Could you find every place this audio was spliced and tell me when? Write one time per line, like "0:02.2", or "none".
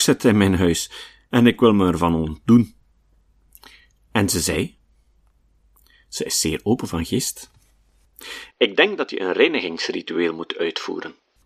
0:08.5